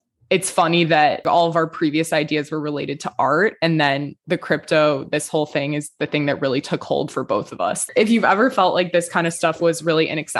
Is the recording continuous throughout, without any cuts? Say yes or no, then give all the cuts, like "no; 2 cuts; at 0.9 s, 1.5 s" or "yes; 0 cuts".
yes; 0 cuts